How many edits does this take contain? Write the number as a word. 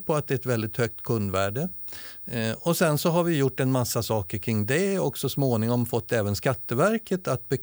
one